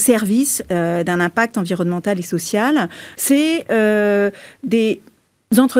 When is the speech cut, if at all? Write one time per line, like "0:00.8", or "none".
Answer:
0:03.1